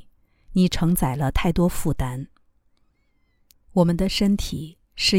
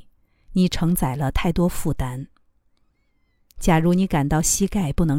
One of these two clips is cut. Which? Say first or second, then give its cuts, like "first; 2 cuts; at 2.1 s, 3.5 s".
first; 1 cut; at 3.5 s